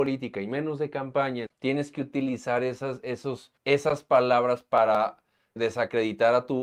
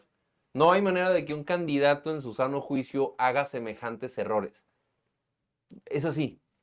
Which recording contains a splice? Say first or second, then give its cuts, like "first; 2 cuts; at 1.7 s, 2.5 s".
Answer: first; 3 cuts; at 1.5 s, 3.6 s, 5.6 s